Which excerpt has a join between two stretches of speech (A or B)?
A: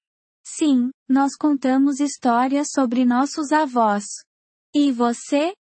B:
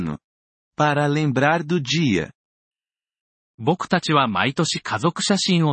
A